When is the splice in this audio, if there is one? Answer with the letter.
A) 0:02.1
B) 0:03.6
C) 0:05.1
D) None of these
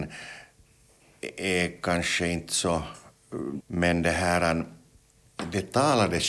B